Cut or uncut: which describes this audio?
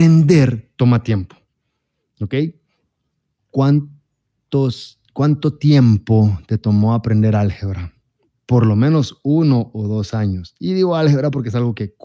cut